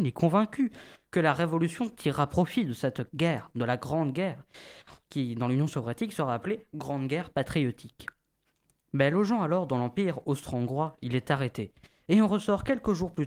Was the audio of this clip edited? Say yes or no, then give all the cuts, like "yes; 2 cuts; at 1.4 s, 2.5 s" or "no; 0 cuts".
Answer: yes; 1 cut; at 5.0 s